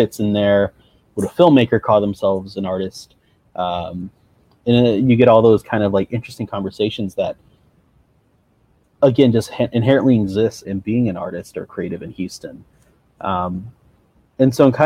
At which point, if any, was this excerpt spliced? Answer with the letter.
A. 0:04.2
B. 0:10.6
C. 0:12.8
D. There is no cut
B